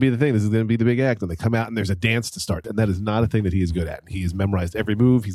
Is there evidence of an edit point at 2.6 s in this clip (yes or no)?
yes